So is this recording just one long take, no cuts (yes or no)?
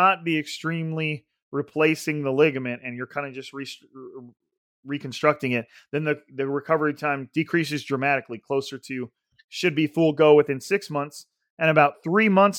yes